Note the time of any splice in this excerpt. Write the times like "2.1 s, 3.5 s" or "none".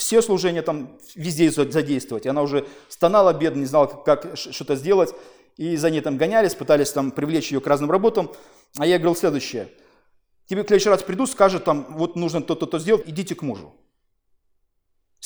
13.0 s